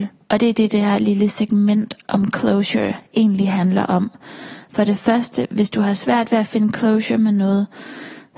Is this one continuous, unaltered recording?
yes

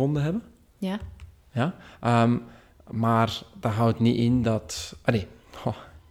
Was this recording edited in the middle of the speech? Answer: no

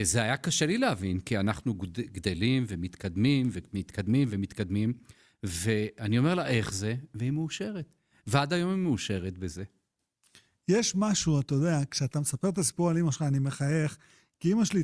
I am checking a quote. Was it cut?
no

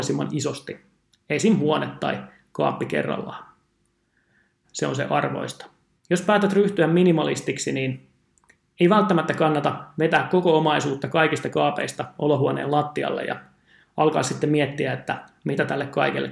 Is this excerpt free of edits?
no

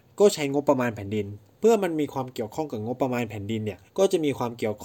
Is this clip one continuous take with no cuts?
no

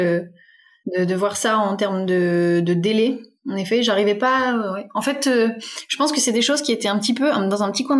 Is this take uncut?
yes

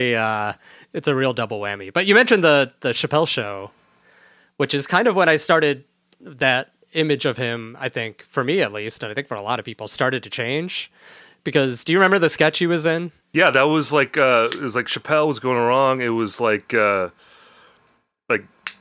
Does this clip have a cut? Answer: yes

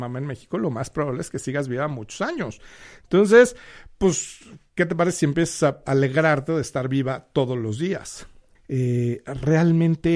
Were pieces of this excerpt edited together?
yes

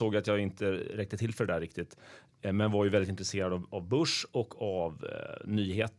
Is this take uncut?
yes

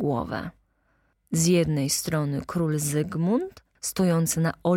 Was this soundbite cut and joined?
yes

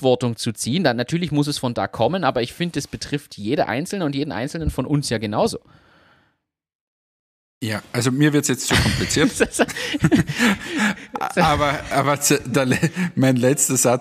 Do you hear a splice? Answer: no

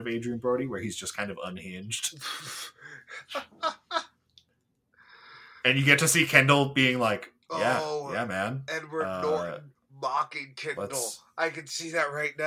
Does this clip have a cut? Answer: yes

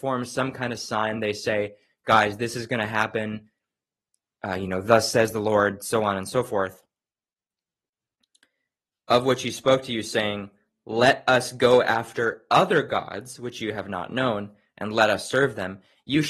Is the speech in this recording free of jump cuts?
yes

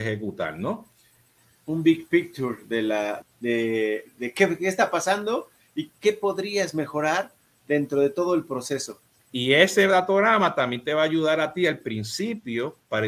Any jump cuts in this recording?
yes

